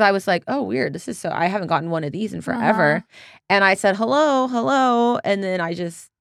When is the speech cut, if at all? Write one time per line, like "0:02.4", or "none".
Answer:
none